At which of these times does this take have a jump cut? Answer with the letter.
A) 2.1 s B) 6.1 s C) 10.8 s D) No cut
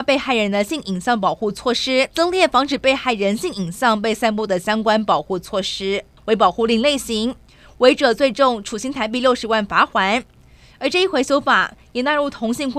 A